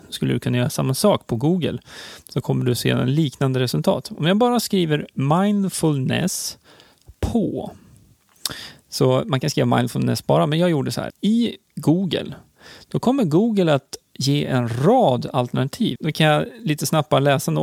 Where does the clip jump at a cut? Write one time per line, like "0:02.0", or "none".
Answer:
0:11.1
0:16.0